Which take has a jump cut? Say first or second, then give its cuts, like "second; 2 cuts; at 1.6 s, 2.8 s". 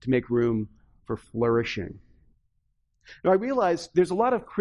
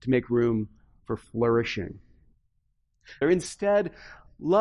second; 1 cut; at 3.2 s